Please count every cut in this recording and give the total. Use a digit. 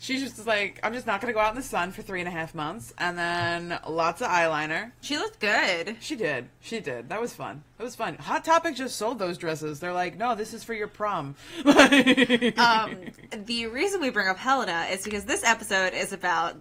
1